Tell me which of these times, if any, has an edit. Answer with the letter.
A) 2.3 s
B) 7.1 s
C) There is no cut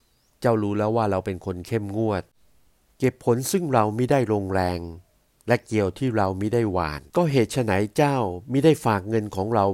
B